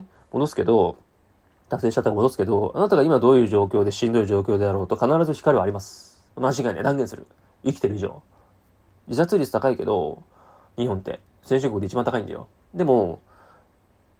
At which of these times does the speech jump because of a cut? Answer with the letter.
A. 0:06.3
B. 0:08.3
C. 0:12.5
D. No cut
A